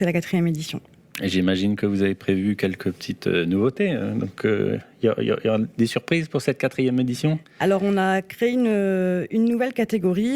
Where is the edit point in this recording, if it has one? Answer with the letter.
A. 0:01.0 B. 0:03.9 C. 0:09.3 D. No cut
D